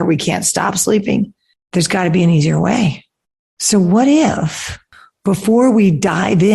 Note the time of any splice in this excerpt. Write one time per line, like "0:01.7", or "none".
0:03.4

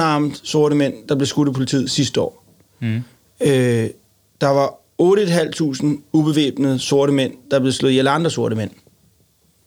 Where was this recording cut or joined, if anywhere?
none

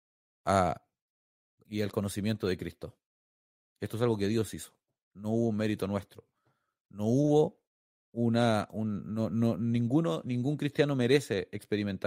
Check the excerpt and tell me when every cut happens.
none

